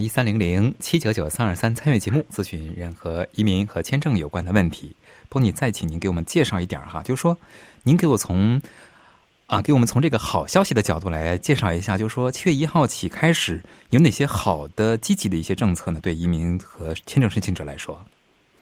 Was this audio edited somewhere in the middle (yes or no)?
no